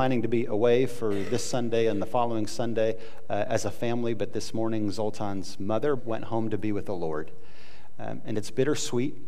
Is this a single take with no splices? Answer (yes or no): no